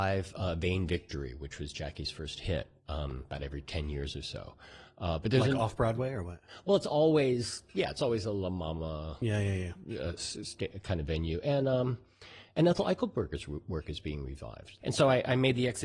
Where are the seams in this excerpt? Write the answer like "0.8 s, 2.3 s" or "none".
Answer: 14.8 s